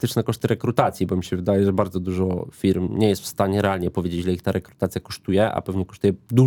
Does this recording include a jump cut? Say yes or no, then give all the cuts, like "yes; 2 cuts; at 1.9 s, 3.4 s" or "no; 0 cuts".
no; 0 cuts